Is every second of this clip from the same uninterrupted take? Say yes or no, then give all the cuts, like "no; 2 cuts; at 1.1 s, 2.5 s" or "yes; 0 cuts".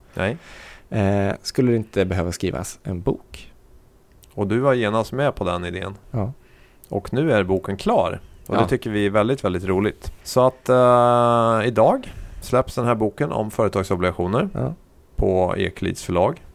yes; 0 cuts